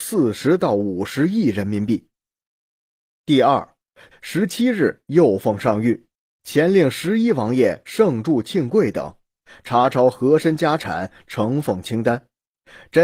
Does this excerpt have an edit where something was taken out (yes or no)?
yes